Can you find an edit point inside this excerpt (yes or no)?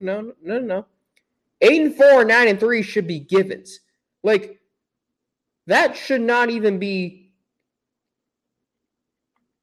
no